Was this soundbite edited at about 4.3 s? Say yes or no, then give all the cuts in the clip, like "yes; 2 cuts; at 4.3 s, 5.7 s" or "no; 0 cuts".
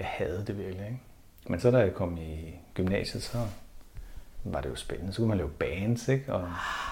no; 1 cut; at 1.3 s